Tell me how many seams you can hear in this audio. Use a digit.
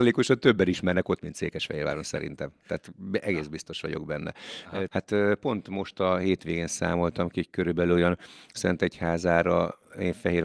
1